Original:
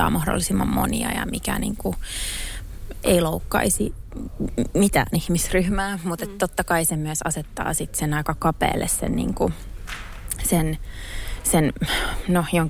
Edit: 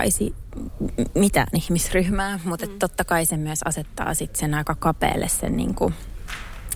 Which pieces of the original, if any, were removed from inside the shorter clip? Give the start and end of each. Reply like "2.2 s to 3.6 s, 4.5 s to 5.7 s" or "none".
none